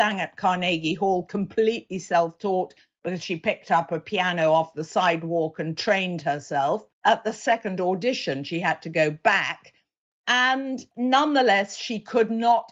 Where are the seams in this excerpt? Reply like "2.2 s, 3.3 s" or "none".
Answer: 6.9 s